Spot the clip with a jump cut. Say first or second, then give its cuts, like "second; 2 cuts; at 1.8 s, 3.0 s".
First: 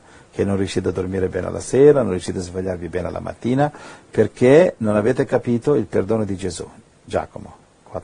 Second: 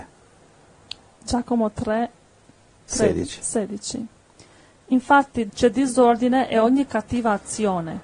second; 1 cut; at 5.5 s